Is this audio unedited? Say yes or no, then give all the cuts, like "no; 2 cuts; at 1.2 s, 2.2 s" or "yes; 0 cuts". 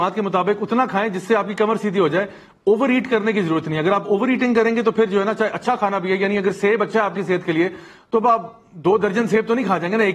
yes; 0 cuts